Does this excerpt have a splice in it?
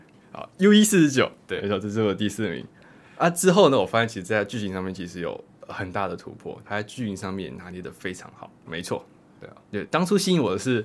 yes; 3 cuts; at 2.8 s, 6.7 s, 8.7 s

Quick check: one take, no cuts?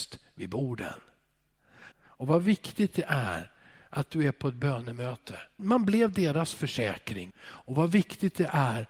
no; 3 cuts; at 1.9 s, 5.6 s, 7.3 s

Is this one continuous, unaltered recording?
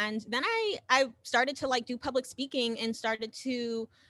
yes; 0 cuts

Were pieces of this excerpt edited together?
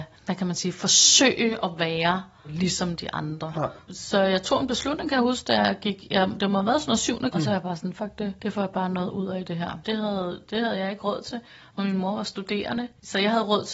yes; 2 cuts; at 7.3 s, 9.8 s

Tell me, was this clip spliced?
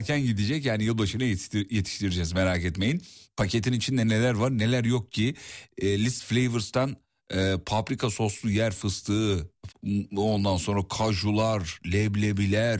yes; 1 cut; at 9.7 s

